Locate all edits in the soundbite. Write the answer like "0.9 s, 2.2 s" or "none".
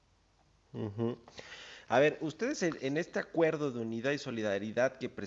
none